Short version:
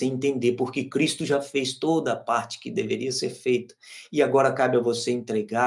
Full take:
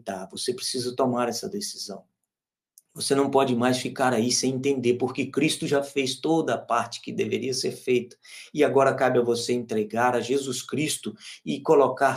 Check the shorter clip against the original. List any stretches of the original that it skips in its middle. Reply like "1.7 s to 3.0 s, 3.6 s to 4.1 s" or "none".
none

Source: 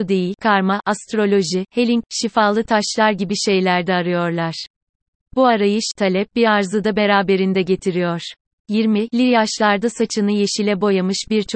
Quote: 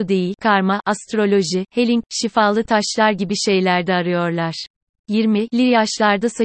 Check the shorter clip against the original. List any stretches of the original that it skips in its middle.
5.0 s to 8.6 s

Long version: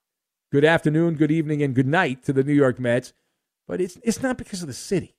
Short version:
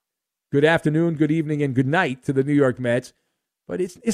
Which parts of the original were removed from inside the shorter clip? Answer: none

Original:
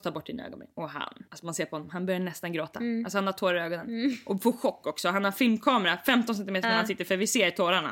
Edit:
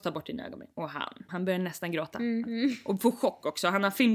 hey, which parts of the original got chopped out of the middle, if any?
1.3 s to 1.9 s, 3.0 s to 3.8 s

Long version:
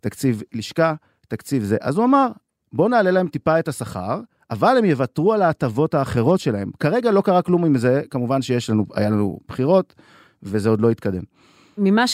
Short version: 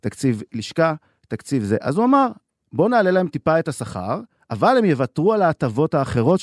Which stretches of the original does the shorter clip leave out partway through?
none

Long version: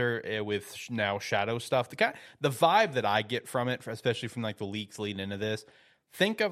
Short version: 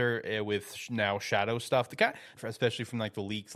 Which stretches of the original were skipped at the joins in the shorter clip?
2.4 s to 3.8 s

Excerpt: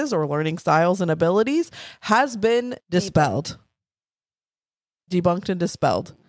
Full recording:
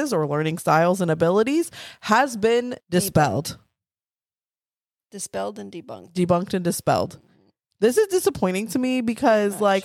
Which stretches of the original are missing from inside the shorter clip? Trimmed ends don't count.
5.1 s to 6.1 s

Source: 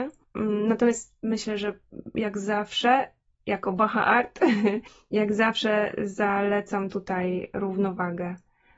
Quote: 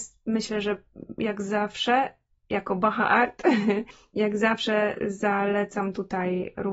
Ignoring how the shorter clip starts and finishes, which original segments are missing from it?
none

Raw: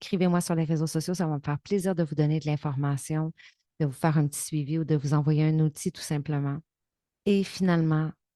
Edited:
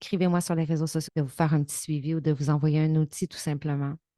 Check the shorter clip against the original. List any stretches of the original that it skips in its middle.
1.1 s to 3.7 s

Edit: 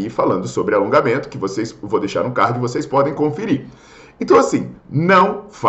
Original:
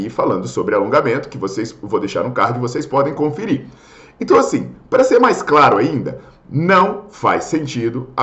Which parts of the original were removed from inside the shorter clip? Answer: 4.8 s to 6.4 s

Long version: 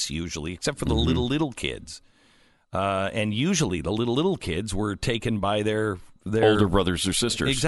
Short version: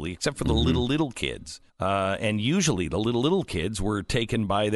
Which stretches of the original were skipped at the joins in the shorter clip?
2.1 s to 2.6 s

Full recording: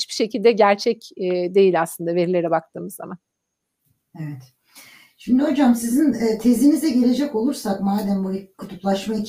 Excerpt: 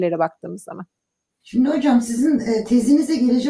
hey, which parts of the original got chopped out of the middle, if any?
3.7 s to 5.1 s

